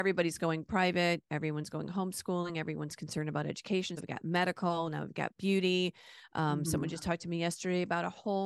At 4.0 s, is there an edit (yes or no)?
yes